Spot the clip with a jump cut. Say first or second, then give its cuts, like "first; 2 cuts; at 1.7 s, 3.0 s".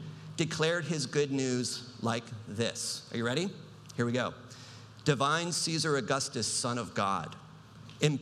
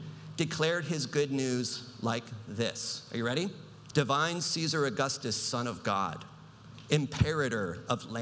second; 1 cut; at 3.9 s